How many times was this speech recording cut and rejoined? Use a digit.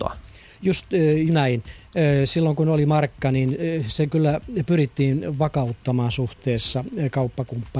1